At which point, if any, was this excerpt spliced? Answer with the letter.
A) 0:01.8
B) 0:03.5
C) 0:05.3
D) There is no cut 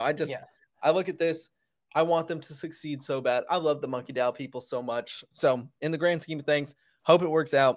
C